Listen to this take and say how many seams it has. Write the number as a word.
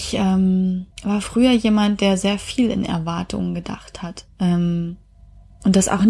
two